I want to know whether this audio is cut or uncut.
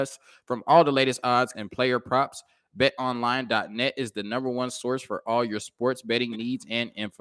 cut